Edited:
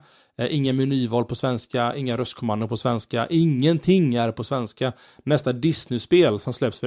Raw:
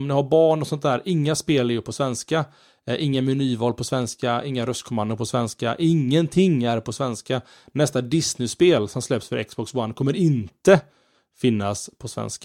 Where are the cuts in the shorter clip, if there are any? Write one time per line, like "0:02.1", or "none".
none